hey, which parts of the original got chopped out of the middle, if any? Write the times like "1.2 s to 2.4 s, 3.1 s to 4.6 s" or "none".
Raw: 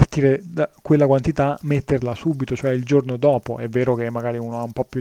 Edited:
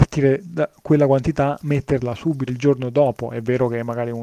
2.5 s to 2.7 s